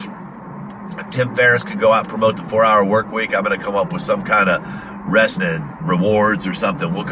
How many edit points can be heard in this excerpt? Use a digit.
1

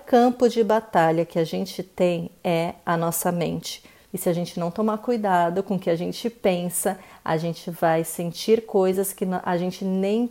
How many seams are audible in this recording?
1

